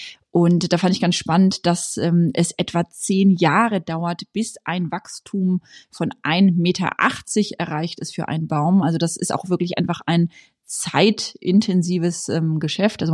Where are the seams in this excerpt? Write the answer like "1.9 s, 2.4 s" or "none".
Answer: none